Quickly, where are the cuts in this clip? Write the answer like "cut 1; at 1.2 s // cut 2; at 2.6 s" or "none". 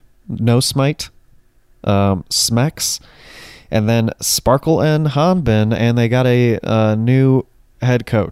none